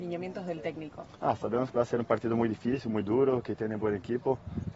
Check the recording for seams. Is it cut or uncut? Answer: cut